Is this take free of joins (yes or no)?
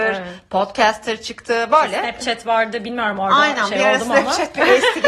yes